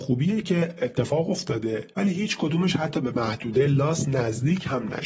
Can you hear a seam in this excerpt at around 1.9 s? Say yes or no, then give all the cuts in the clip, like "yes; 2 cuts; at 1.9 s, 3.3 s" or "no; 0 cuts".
yes; 1 cut; at 1.9 s